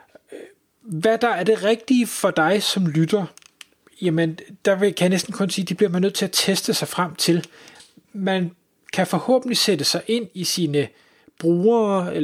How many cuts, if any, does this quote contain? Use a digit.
0